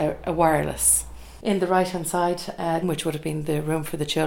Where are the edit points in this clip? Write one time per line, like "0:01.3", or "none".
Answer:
0:02.8